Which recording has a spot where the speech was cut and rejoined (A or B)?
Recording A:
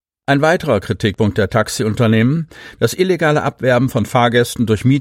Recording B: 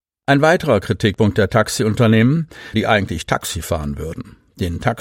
B